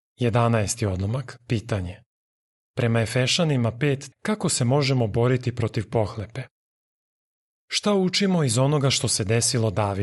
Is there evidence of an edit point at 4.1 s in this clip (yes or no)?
yes